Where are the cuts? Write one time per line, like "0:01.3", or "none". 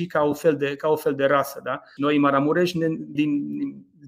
0:02.0
0:03.2